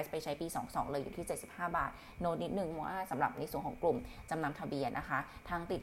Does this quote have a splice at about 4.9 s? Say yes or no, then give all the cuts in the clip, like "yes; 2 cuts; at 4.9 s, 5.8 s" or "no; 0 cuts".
yes; 1 cut; at 4.9 s